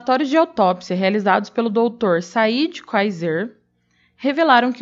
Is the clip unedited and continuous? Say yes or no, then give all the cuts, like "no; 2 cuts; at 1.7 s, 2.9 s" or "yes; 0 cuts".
yes; 0 cuts